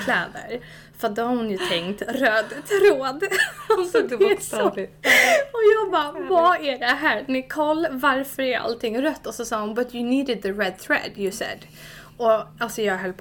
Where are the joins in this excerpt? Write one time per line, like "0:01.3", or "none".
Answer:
none